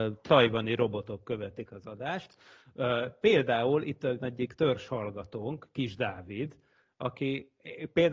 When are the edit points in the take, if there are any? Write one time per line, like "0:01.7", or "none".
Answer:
none